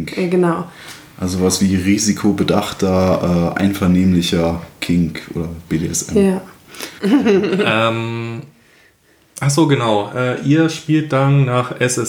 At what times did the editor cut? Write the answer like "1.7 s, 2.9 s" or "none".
7.0 s